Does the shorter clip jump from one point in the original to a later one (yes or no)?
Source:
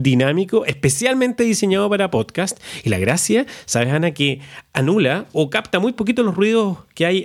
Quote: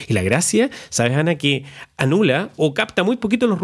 no